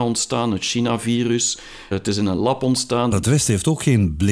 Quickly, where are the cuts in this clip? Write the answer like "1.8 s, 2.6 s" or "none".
1.9 s, 3.1 s